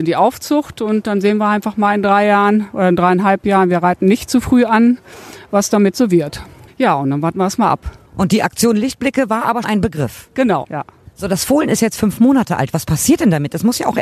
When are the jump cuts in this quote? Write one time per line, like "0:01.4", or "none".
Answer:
0:06.7
0:09.6
0:10.6